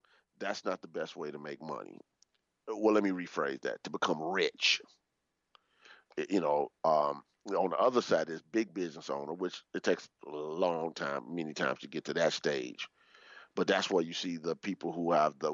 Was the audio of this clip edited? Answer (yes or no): no